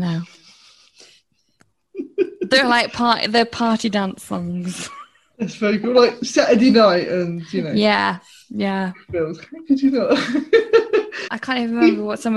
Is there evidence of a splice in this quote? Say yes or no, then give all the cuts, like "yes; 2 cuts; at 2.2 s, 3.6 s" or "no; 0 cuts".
yes; 1 cut; at 11.3 s